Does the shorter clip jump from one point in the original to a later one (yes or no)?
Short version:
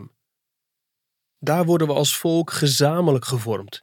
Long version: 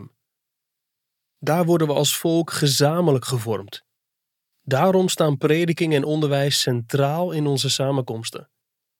no